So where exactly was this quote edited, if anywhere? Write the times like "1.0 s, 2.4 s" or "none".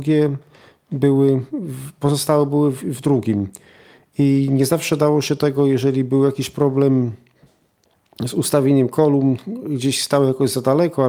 none